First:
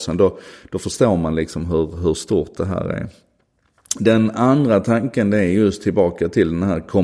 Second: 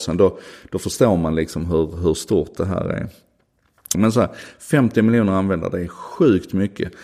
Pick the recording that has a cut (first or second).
second